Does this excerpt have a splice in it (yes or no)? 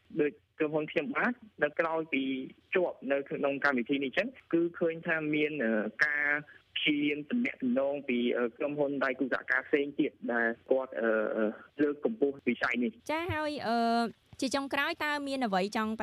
yes